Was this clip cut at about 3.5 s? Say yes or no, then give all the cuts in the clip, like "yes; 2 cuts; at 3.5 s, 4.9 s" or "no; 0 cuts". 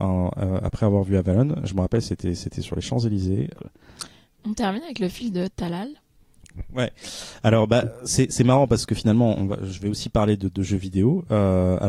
yes; 2 cuts; at 3.5 s, 9.3 s